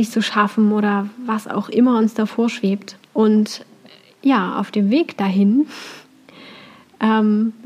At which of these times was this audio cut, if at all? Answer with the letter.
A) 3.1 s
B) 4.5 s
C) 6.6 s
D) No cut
A